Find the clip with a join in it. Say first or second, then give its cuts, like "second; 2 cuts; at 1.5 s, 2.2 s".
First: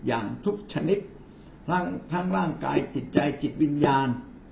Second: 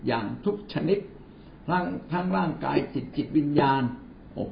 second; 1 cut; at 3.1 s